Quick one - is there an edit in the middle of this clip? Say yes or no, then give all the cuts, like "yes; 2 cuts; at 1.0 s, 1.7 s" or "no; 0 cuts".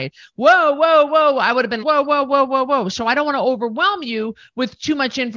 yes; 1 cut; at 1.8 s